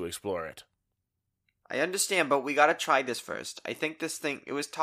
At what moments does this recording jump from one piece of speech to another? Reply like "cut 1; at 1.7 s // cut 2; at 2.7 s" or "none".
none